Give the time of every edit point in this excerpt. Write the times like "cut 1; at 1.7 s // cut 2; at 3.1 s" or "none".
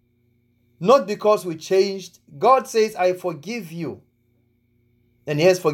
none